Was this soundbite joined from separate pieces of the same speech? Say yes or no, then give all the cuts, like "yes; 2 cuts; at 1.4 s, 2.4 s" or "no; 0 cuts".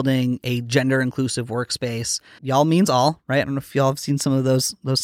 yes; 1 cut; at 2.4 s